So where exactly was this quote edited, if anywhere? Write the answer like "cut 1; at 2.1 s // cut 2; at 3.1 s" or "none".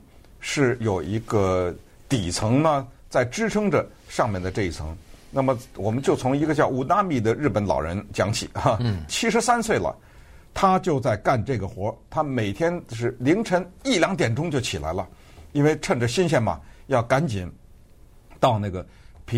cut 1; at 9.1 s